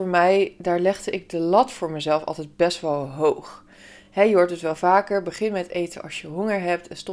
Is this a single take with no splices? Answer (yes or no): yes